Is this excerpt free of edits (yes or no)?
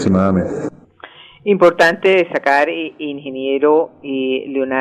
yes